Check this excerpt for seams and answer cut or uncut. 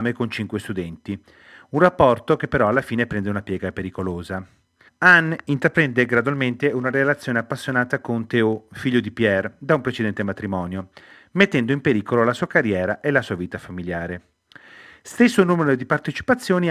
cut